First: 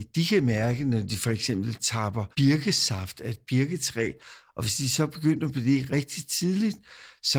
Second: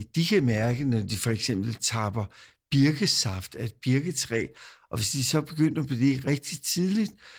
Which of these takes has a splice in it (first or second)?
first